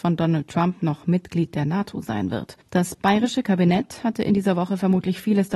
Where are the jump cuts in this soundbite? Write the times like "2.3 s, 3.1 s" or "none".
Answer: 2.6 s